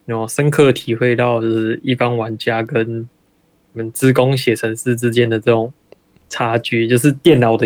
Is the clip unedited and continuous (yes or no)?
yes